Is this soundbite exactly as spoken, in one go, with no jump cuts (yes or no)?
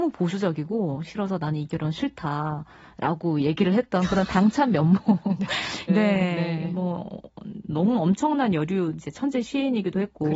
no